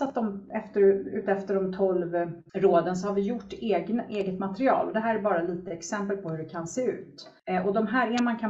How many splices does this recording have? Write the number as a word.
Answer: zero